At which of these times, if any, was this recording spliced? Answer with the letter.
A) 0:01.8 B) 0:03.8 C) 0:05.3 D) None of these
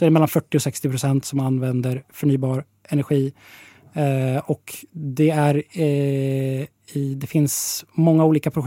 D